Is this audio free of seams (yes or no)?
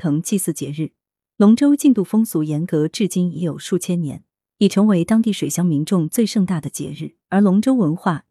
no